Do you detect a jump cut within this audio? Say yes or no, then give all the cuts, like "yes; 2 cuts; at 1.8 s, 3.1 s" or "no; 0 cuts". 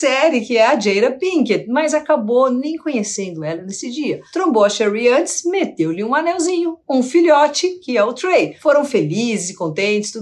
no; 0 cuts